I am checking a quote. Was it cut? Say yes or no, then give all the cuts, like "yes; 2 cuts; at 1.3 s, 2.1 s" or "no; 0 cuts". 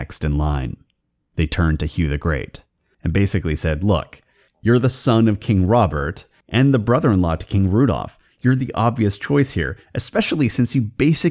no; 0 cuts